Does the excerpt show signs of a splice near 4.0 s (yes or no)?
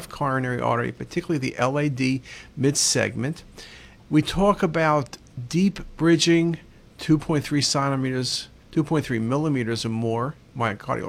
yes